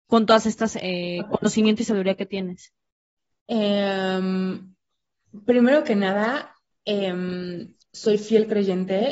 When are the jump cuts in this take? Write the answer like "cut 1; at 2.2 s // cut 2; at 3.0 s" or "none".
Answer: cut 1; at 7.8 s